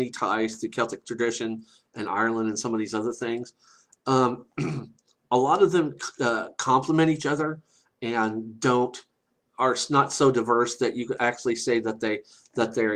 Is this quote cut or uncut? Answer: uncut